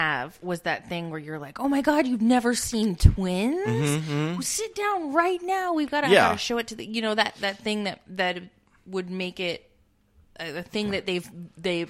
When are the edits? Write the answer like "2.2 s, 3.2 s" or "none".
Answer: none

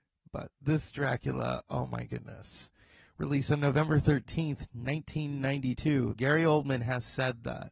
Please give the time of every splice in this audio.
6.1 s

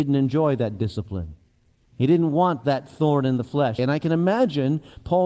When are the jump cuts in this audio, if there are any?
3.8 s

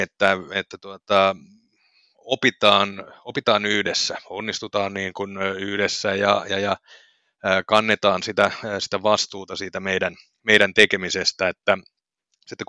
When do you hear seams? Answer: none

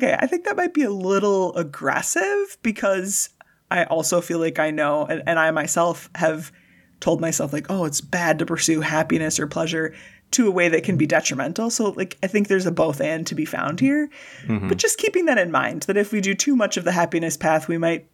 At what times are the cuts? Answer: none

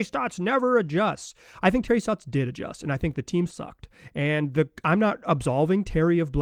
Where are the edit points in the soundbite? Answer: 3.5 s

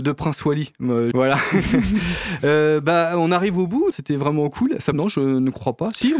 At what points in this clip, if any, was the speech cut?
1.1 s, 3.9 s, 4.9 s

